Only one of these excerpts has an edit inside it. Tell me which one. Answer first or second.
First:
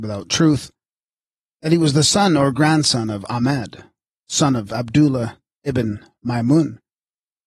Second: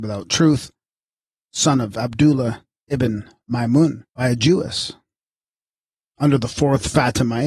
second